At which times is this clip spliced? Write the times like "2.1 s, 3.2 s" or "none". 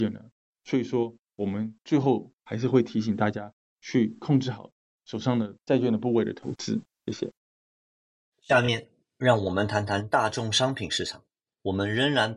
none